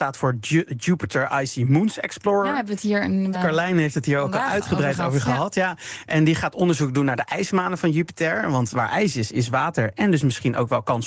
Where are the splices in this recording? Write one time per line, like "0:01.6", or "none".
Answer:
0:03.3

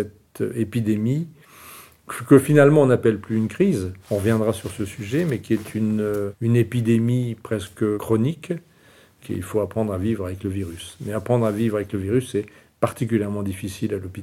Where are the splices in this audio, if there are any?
0:04.0
0:09.2

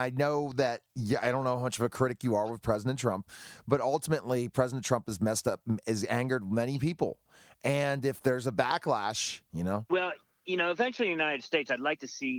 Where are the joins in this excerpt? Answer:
0:09.5

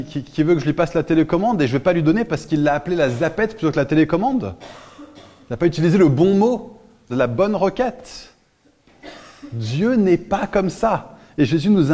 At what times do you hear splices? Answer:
0:07.1

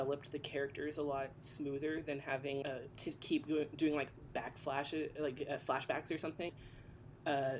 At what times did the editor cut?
0:02.6
0:06.5

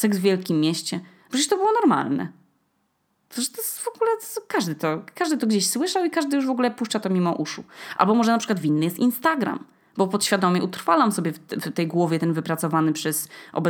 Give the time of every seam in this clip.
none

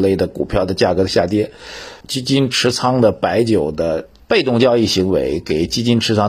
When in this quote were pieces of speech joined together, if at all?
0:02.0
0:04.2

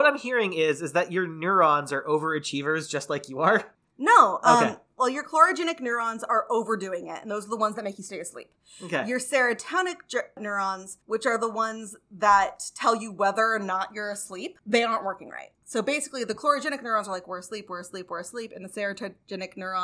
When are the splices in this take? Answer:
none

